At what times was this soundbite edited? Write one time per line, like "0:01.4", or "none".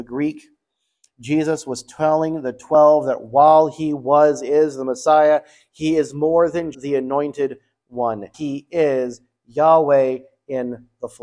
0:06.7
0:08.3